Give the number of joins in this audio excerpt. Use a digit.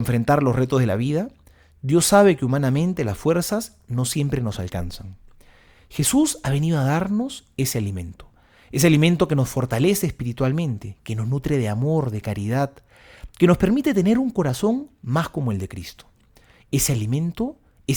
0